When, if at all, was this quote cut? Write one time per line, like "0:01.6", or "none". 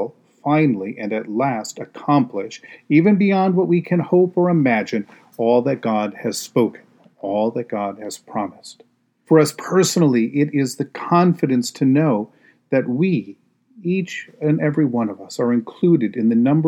0:09.3